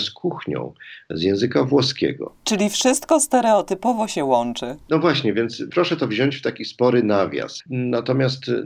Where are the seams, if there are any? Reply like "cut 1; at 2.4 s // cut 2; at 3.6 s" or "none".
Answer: cut 1; at 7.6 s